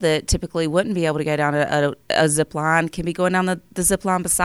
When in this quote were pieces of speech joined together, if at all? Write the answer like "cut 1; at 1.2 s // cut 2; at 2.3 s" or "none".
cut 1; at 2.0 s